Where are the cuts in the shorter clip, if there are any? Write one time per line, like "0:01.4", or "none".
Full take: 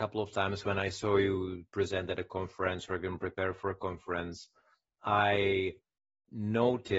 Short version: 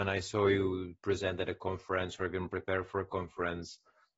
none